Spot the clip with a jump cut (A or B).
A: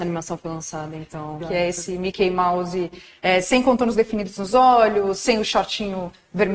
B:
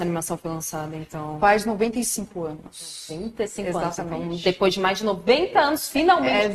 A